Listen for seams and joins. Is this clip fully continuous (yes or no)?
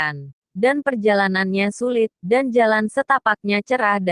no